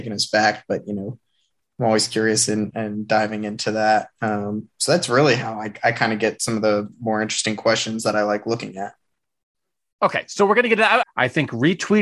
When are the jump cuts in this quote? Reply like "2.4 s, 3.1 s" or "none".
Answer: 2.7 s, 11.0 s